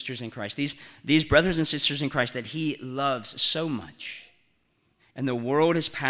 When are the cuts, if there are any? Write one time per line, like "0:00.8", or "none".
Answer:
0:05.0